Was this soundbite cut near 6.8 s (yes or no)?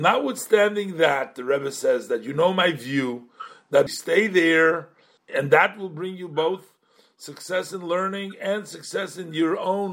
no